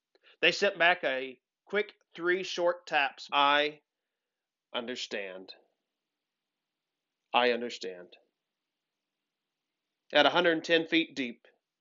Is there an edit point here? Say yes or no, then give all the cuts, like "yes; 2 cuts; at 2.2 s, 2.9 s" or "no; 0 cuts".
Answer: yes; 1 cut; at 3.3 s